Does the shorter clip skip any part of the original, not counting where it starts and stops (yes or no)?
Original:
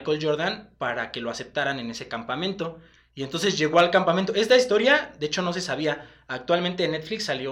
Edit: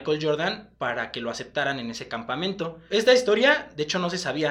yes